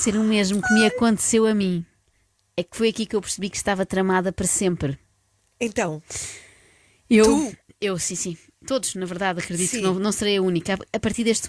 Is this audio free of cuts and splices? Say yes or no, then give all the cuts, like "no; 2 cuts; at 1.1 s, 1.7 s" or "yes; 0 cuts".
yes; 0 cuts